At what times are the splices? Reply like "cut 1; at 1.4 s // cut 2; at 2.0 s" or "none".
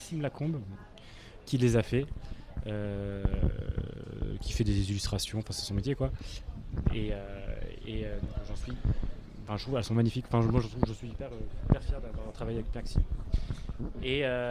none